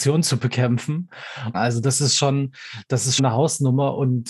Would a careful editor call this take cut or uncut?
cut